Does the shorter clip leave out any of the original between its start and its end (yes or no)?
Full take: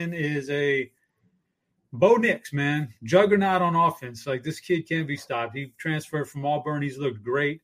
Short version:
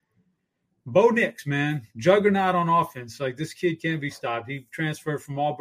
no